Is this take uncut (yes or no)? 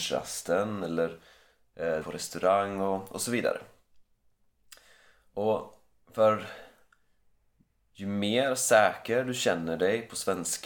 no